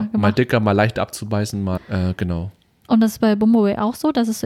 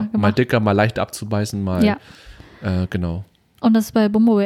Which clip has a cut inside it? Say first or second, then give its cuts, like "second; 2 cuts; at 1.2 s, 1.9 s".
first; 1 cut; at 1.8 s